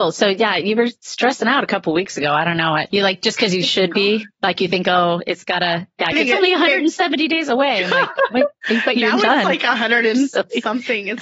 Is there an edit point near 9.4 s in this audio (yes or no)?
no